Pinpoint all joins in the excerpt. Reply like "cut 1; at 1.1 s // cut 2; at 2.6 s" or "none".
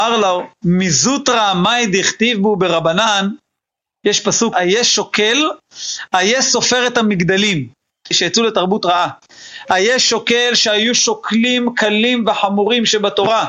cut 1; at 4.5 s // cut 2; at 8.1 s // cut 3; at 9.7 s